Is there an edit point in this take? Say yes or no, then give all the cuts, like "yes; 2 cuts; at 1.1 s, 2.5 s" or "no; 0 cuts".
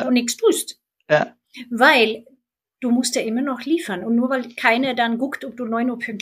no; 0 cuts